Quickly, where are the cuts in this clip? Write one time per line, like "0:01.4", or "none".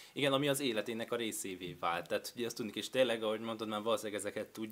0:02.7